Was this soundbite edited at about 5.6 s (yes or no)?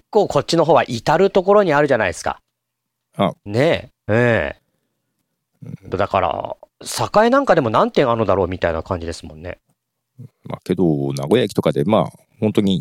no